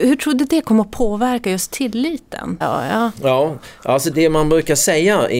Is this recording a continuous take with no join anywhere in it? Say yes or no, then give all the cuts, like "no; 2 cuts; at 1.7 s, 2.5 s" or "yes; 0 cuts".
no; 2 cuts; at 2.6 s, 4.1 s